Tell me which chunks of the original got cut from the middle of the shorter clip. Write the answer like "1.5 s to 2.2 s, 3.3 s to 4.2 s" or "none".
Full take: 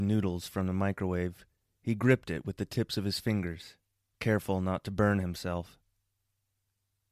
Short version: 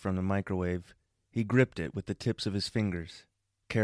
none